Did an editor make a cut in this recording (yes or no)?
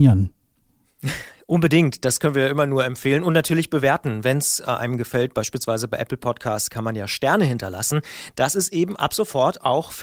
no